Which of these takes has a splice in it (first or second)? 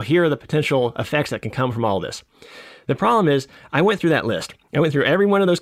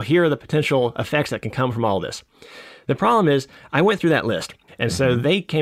second